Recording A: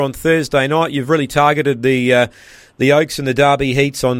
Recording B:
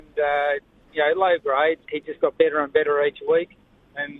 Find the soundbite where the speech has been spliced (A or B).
B